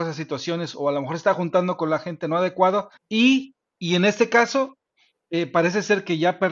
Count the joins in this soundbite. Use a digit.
1